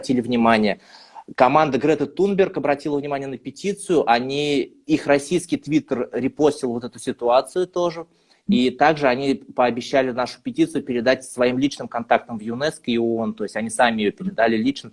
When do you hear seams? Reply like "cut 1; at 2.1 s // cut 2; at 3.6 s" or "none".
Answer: none